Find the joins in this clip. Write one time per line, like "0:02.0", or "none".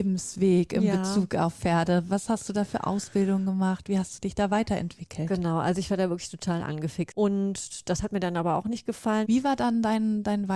0:07.1
0:09.2